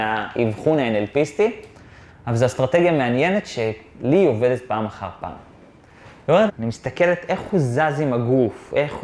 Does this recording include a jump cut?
yes; 1 cut; at 6.5 s

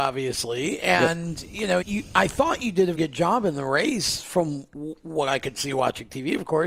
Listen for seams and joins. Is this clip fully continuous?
no; 2 cuts; at 1.8 s, 2.9 s

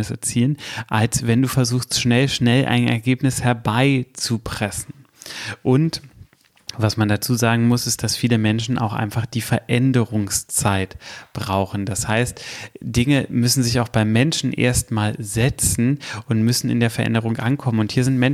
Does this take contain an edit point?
no; 0 cuts

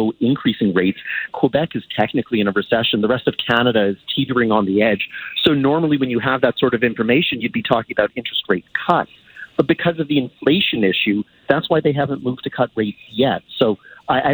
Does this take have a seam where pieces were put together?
yes; 1 cut; at 1.3 s

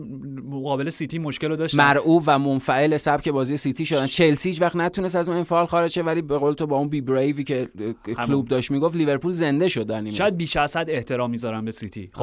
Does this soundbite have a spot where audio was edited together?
no; 0 cuts

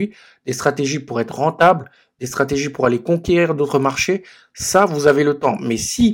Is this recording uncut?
yes; 0 cuts

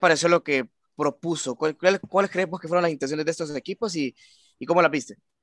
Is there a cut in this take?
no; 0 cuts

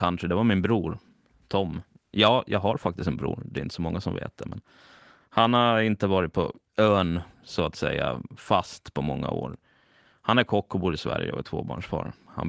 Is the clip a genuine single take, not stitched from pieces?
yes; 0 cuts

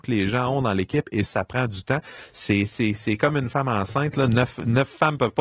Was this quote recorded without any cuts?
no; 1 cut; at 1.3 s

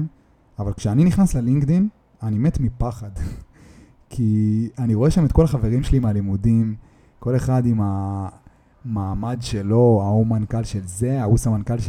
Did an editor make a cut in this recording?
no; 0 cuts

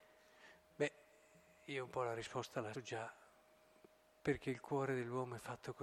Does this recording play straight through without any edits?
no; 1 cut; at 2.7 s

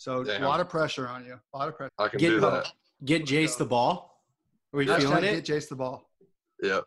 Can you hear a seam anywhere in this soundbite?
yes; 1 cut; at 1.9 s

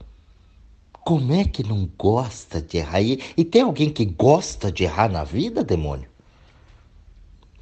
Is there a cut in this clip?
no; 0 cuts

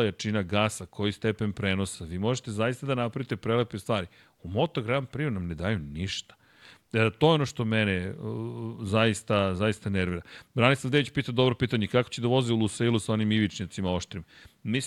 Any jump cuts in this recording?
no; 0 cuts

